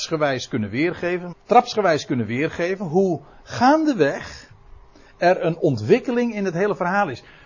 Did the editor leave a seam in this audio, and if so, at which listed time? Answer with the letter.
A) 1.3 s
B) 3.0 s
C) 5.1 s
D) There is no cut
A